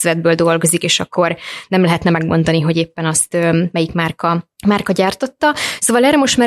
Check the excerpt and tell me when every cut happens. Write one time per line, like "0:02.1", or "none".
0:04.6